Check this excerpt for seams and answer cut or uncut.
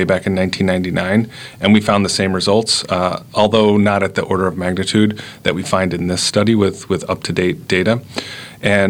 uncut